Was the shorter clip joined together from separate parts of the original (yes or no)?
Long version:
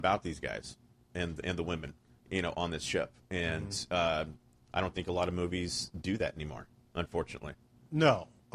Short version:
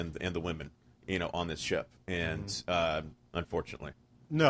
yes